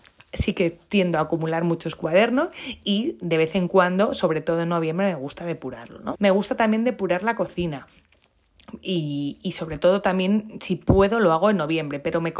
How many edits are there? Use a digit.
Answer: 1